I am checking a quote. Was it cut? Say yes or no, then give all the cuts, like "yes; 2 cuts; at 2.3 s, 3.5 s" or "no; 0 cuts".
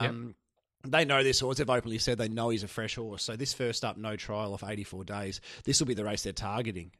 no; 0 cuts